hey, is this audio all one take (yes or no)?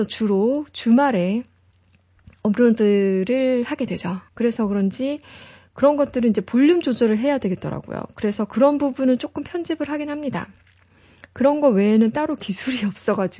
no